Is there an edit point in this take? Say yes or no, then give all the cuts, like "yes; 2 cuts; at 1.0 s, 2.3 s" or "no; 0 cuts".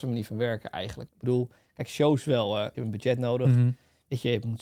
yes; 2 cuts; at 1.1 s, 2.7 s